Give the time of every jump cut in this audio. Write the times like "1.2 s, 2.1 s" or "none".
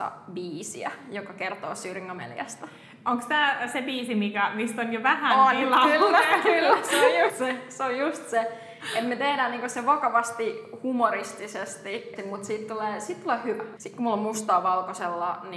7.3 s, 12.2 s, 13.8 s